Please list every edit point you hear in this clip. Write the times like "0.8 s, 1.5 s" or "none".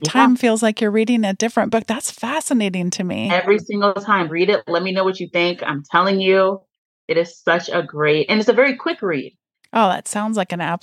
4.3 s, 9.6 s